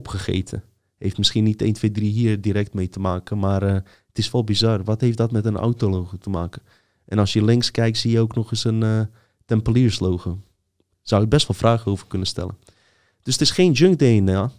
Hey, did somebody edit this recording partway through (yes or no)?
no